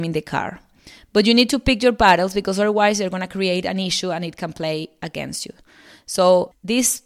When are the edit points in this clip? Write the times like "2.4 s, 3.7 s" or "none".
none